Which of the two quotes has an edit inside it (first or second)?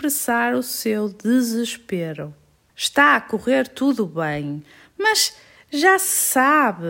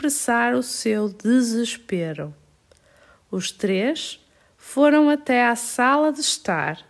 first